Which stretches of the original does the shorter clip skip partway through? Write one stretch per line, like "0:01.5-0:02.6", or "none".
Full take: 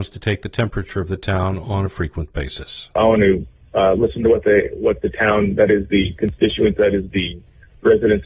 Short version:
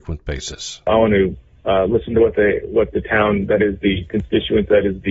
none